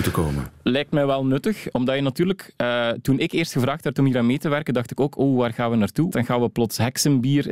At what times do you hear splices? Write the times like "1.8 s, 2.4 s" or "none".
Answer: 1.7 s, 6.1 s